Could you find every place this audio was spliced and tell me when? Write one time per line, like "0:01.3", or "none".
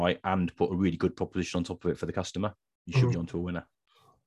none